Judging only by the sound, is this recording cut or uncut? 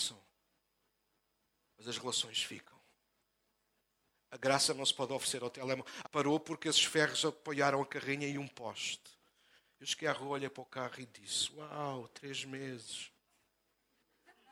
cut